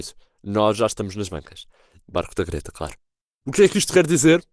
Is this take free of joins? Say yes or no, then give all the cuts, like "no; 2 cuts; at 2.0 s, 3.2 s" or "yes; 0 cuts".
no; 1 cut; at 2.0 s